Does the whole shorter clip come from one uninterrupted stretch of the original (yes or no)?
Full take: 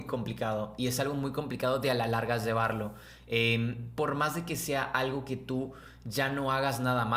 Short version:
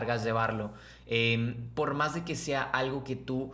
yes